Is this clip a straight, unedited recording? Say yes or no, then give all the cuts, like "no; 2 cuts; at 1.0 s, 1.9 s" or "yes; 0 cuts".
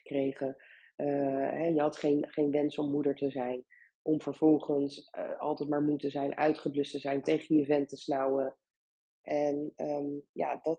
no; 2 cuts; at 7.2 s, 9.2 s